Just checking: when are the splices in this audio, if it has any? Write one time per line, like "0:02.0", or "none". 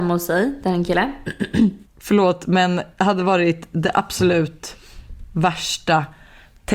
0:01.8